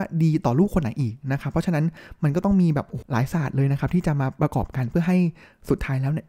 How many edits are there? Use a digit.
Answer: 1